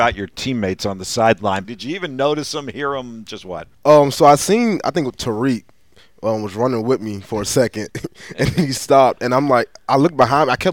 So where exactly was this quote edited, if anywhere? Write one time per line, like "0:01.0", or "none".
0:01.6
0:03.7